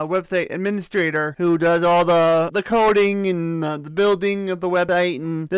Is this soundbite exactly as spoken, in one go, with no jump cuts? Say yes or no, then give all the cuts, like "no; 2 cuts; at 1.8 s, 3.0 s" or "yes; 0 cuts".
yes; 0 cuts